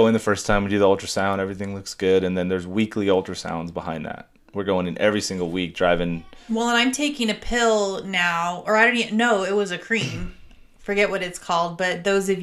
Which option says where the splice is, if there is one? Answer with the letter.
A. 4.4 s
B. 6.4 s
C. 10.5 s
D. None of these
D